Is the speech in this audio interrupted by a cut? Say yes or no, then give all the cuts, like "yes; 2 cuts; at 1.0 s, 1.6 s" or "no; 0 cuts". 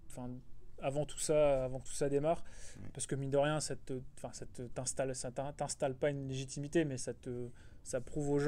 no; 0 cuts